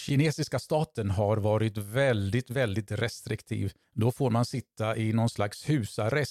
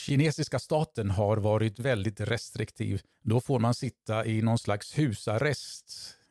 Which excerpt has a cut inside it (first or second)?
second